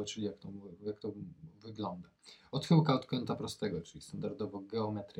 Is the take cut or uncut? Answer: uncut